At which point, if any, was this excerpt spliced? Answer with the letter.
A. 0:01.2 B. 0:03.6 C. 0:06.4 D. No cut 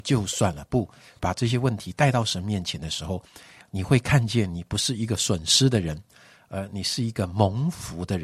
A